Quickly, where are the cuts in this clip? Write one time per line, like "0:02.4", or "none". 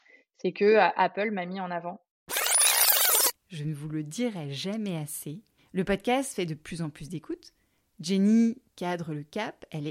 0:03.4
0:05.6